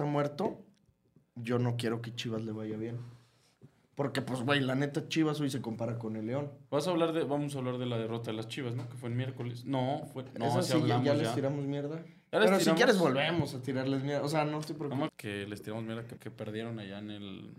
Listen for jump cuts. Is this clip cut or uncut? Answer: cut